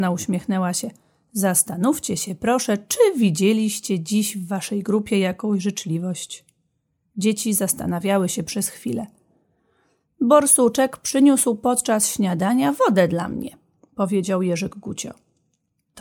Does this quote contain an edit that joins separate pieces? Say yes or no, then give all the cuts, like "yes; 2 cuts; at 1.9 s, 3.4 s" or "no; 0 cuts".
no; 0 cuts